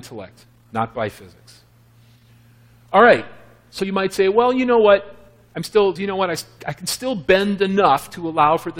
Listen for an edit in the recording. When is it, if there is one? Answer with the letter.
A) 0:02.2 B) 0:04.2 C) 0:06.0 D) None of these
C